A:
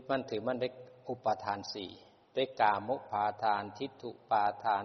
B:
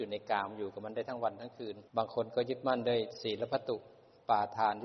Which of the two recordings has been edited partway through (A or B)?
B